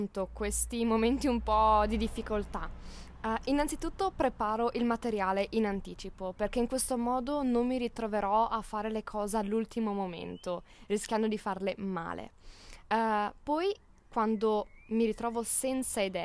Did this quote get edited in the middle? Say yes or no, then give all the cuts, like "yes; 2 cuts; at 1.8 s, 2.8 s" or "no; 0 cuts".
no; 0 cuts